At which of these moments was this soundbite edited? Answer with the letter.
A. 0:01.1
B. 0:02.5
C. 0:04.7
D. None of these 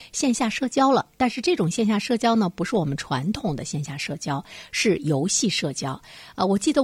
D